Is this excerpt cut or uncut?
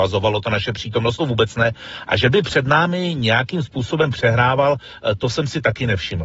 uncut